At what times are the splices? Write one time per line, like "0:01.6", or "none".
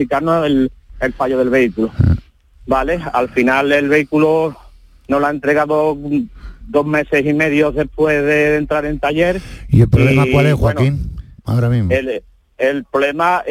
none

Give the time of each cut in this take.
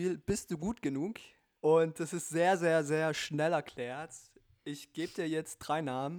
0:01.5

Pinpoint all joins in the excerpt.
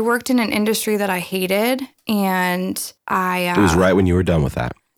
0:03.0

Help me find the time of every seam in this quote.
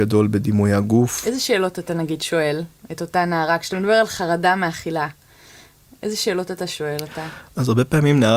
none

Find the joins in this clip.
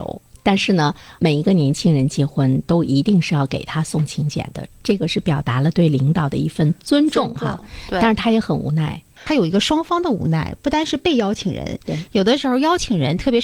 0:09.2

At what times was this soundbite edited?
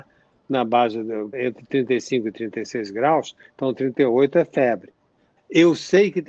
0:01.3
0:05.4

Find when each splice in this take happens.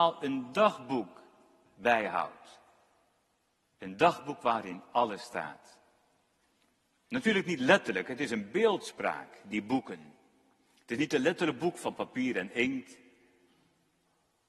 none

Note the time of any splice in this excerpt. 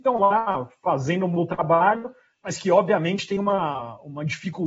none

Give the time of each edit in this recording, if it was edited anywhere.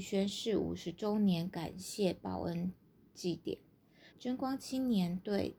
0:04.1

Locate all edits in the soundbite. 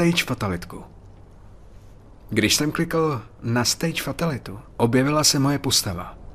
0:04.7

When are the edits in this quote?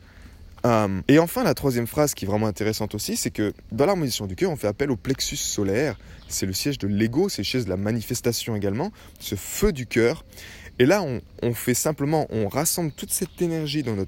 0:01.1

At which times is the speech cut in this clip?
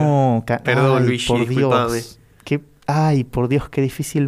none

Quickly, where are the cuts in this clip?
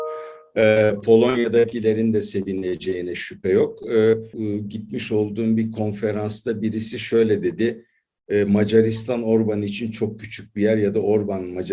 0:04.3

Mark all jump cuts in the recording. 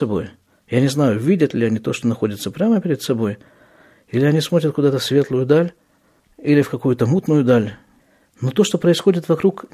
none

